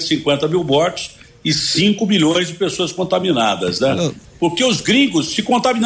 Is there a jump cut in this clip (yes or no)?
yes